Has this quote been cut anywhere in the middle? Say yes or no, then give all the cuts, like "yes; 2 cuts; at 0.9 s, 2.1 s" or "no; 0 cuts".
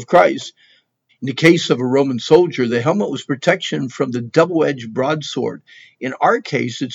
yes; 1 cut; at 1.1 s